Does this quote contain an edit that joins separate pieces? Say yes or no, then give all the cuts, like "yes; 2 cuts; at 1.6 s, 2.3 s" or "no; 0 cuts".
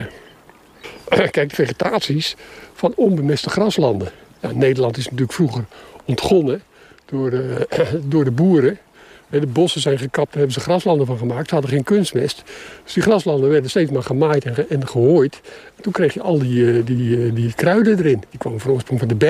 yes; 1 cut; at 1.5 s